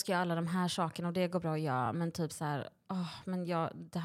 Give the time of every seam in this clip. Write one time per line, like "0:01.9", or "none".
none